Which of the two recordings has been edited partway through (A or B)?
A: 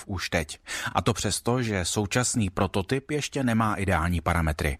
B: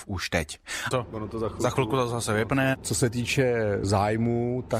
B